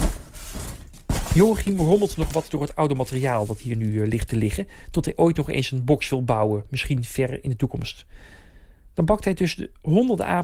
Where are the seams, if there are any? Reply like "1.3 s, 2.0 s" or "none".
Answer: none